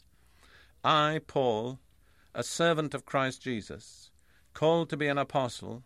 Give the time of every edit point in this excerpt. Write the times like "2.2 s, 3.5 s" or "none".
none